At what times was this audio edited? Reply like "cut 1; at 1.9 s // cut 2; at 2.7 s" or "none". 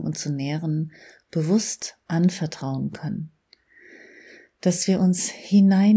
none